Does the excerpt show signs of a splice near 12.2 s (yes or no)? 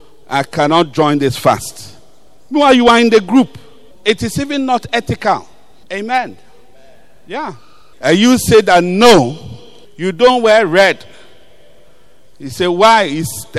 no